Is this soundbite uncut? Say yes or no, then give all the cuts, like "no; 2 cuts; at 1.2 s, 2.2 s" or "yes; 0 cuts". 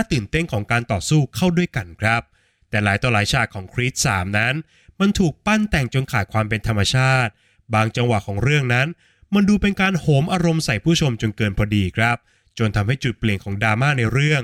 yes; 0 cuts